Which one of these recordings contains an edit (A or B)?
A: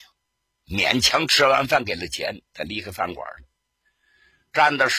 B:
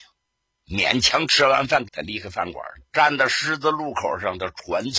B